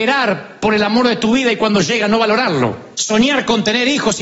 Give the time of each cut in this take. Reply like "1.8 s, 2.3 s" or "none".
2.9 s